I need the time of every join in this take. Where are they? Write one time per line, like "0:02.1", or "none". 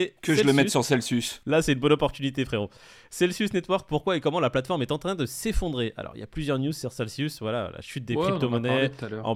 none